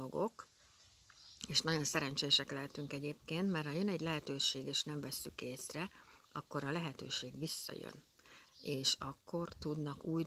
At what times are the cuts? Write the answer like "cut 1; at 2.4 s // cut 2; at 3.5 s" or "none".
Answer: cut 1; at 8.5 s